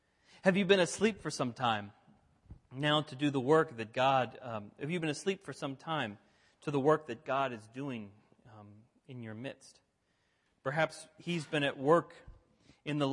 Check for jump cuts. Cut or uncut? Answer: uncut